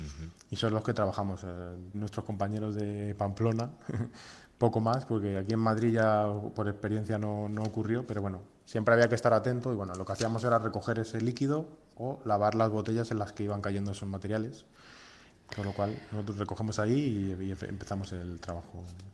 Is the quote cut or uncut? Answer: cut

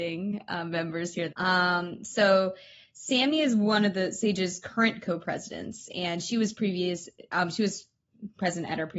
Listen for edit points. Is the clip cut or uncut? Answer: cut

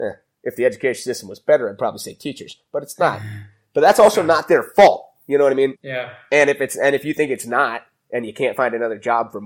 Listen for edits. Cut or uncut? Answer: cut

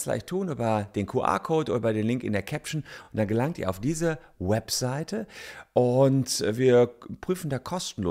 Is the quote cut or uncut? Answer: uncut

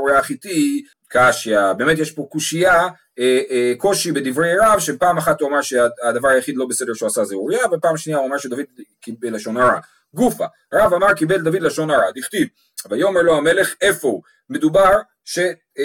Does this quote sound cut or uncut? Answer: cut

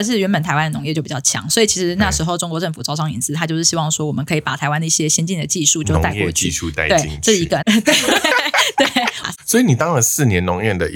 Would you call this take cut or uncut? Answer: cut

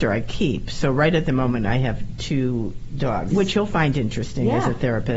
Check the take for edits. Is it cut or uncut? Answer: cut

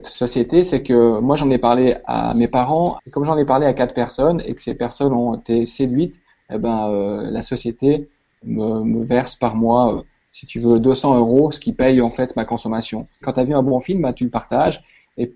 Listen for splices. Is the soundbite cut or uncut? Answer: cut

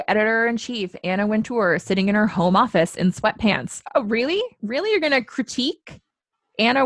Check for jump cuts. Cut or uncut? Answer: uncut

